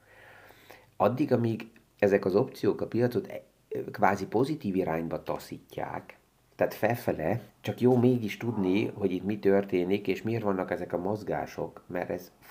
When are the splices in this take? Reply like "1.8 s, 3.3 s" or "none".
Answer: 7.5 s